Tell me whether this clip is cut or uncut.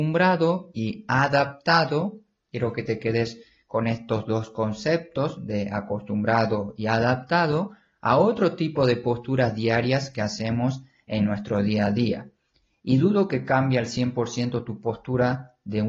uncut